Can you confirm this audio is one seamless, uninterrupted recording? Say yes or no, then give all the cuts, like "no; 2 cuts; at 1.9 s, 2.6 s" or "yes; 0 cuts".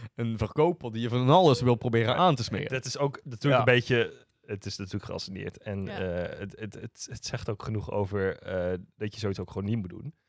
yes; 0 cuts